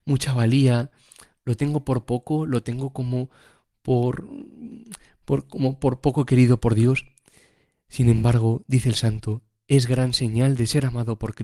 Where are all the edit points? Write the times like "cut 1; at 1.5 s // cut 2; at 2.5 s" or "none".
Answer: none

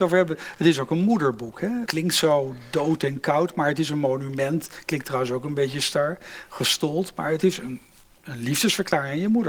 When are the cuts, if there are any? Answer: cut 1; at 1.9 s

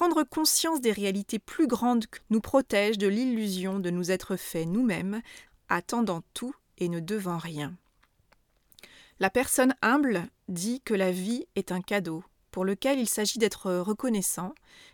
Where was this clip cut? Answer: cut 1; at 2.2 s // cut 2; at 5.5 s

